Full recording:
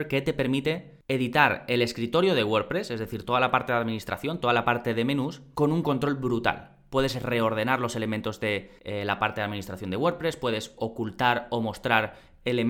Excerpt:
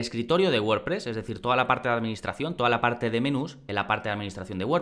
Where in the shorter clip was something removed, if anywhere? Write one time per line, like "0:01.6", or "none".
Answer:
0:03.7